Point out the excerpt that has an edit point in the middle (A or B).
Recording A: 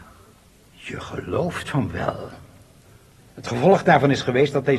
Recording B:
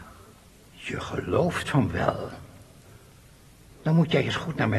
A